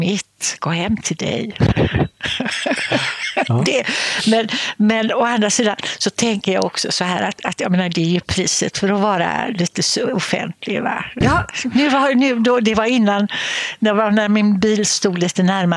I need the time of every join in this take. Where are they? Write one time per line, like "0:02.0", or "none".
0:11.2